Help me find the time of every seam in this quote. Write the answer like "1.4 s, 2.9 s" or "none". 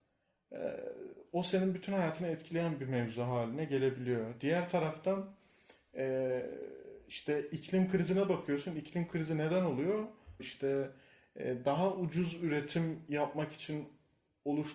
10.4 s